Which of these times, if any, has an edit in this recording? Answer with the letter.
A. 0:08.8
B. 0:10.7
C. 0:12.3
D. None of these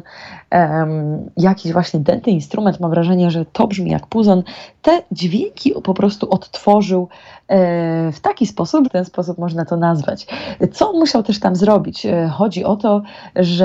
A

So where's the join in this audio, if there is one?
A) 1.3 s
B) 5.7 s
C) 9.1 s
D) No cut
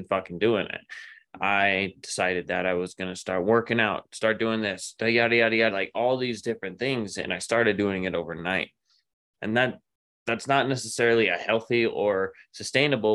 B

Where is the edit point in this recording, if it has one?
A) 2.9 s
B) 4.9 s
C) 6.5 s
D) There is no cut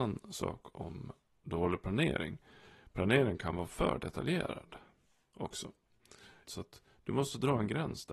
C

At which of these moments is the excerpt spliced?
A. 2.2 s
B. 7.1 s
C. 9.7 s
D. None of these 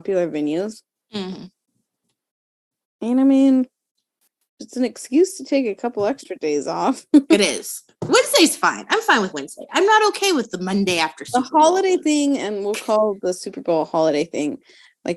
D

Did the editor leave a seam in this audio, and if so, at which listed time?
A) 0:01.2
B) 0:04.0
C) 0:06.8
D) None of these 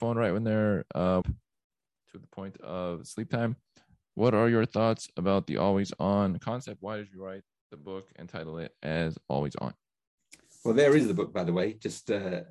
A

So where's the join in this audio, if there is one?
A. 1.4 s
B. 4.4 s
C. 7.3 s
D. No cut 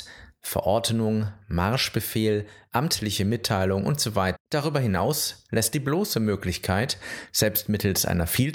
B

